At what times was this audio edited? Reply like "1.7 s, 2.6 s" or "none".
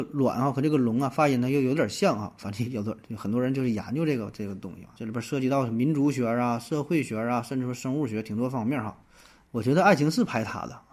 4.9 s, 9.4 s

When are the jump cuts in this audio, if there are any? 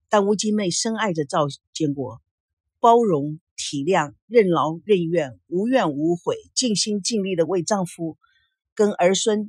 none

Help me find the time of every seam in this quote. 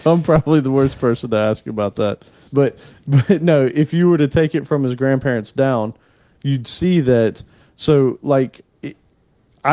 2.5 s

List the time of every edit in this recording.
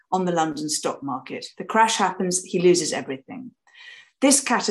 1.5 s

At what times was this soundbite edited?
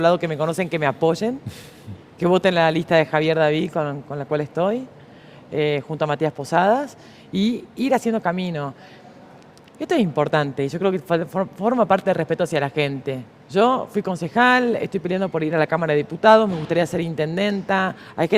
none

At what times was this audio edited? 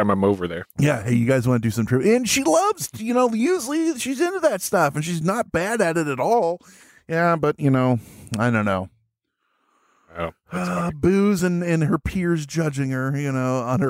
none

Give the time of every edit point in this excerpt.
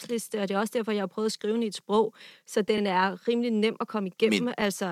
none

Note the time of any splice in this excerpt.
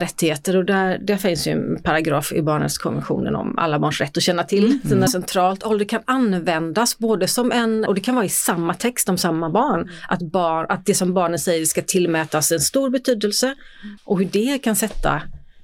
5.1 s, 7.9 s, 14.0 s

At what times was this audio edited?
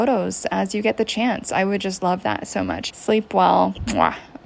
2.9 s

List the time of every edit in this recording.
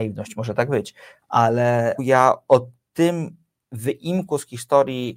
2.0 s

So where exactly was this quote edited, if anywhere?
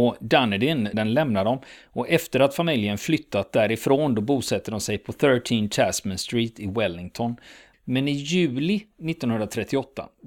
0.9 s, 7.7 s

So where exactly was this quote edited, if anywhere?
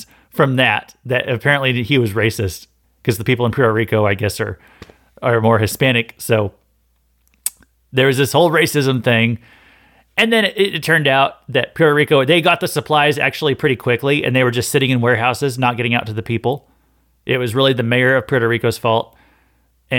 2.8 s

